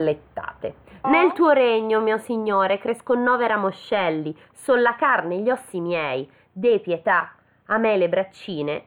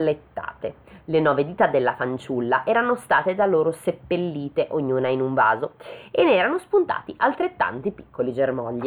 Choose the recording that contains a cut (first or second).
first